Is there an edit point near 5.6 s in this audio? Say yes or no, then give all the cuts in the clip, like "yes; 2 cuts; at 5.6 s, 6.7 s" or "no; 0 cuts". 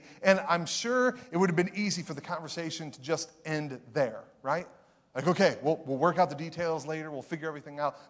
no; 0 cuts